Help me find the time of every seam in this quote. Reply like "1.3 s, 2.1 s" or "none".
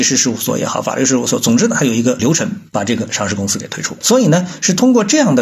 4.0 s